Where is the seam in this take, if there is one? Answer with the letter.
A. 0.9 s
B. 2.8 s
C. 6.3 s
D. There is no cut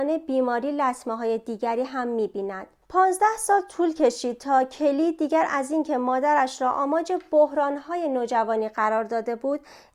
B